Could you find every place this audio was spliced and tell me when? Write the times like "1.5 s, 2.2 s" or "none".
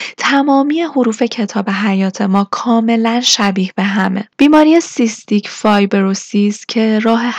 4.3 s